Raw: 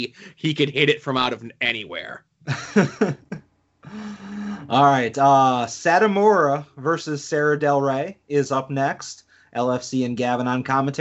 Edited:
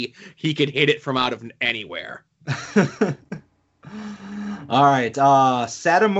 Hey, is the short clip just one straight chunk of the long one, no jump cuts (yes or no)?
yes